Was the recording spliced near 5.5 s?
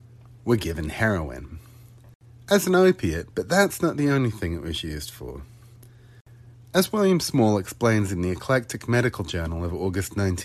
no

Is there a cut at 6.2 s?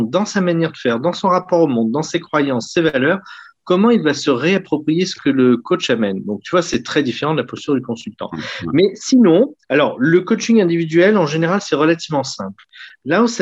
no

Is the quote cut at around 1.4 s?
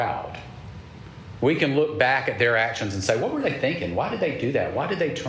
yes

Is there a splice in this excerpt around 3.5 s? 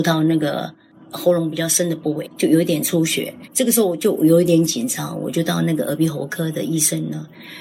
yes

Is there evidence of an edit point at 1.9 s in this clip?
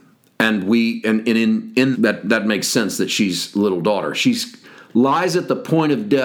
yes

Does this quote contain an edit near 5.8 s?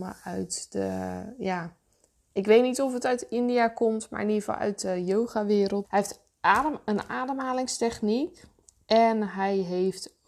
yes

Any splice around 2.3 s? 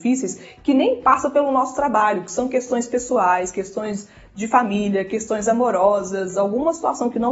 no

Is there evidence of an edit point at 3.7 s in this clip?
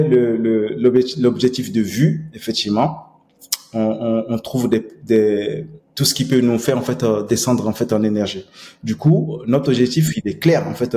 no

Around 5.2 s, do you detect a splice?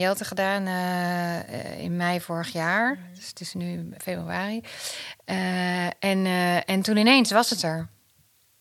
no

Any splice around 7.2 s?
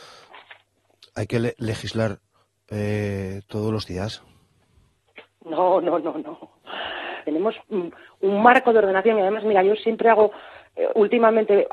yes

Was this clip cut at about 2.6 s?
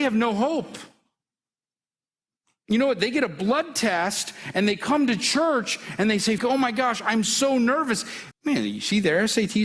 no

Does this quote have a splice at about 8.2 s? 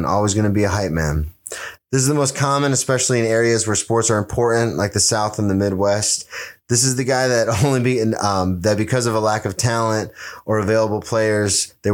no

